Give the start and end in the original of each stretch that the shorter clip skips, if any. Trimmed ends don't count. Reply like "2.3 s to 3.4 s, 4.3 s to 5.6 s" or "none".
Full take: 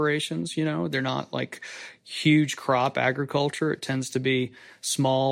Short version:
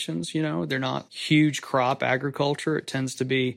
1.3 s to 2.0 s